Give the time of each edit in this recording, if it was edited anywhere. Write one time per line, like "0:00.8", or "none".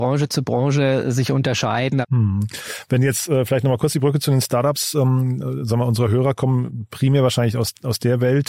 0:02.0